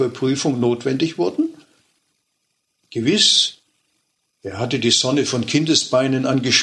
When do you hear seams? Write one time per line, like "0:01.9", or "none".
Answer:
0:02.8